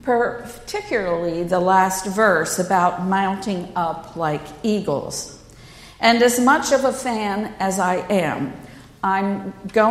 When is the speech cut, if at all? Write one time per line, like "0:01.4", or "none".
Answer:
none

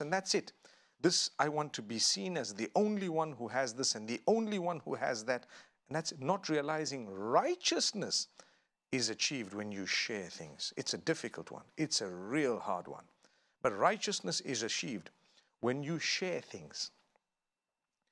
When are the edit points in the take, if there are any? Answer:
none

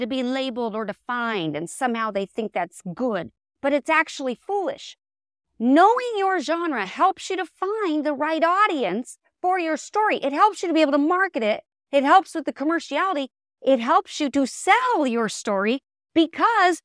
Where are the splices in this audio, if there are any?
none

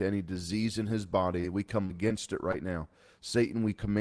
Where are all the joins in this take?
none

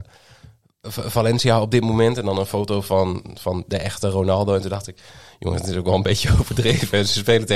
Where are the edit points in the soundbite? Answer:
none

